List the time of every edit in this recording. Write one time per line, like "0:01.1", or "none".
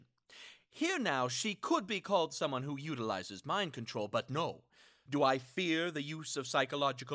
0:05.1